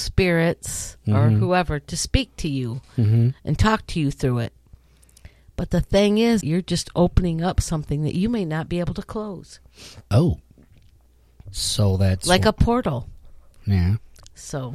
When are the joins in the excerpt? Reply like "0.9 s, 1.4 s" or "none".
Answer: 6.4 s